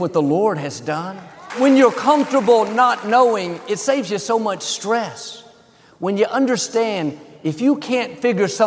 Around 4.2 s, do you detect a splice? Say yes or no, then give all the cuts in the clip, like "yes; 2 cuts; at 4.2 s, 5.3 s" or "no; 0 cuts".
no; 1 cut; at 1.5 s